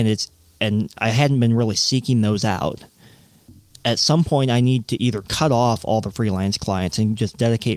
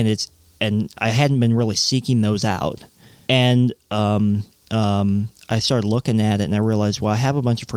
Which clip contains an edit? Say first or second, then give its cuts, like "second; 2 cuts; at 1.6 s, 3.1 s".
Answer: second; 2 cuts; at 3.3 s, 4.7 s